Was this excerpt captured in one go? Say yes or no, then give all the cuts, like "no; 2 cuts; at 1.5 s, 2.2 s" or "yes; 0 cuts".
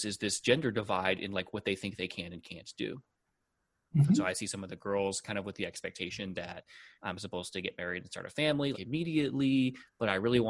no; 2 cuts; at 7.0 s, 8.7 s